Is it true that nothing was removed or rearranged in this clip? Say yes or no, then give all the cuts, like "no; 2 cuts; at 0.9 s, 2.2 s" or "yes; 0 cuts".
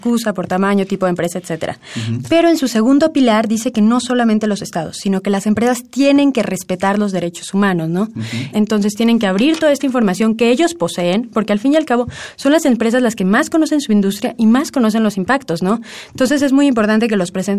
no; 1 cut; at 8.5 s